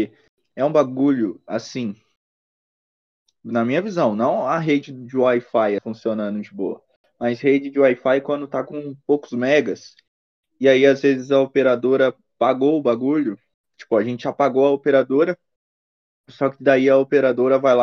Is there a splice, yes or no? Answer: yes